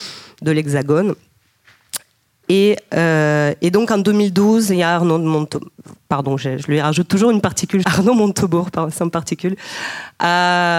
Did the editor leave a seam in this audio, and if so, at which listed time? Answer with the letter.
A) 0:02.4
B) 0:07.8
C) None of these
B